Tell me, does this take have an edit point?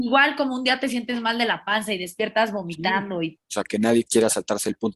yes; 1 cut; at 3.4 s

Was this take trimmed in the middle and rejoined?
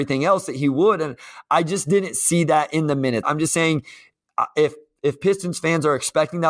yes; 1 cut; at 3.2 s

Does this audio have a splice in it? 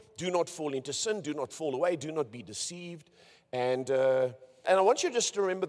yes; 1 cut; at 4.6 s

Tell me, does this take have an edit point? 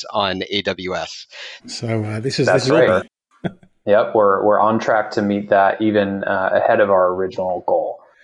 yes; 2 cuts; at 1.6 s, 2.9 s

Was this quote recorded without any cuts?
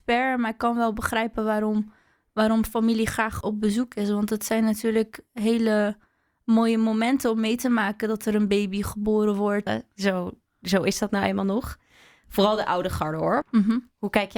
no; 3 cuts; at 3.4 s, 9.7 s, 13.4 s

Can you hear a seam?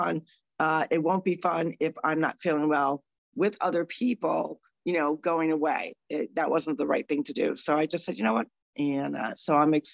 yes; 1 cut; at 8.7 s

